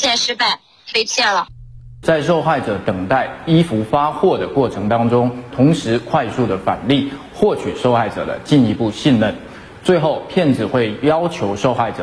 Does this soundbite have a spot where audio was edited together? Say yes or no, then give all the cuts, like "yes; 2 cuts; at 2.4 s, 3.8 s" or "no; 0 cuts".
yes; 3 cuts; at 0.9 s, 2.0 s, 5.5 s